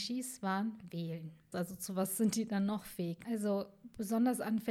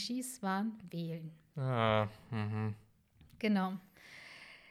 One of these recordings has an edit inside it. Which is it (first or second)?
first